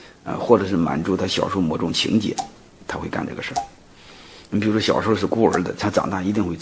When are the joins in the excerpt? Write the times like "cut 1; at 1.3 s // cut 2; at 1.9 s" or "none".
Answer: none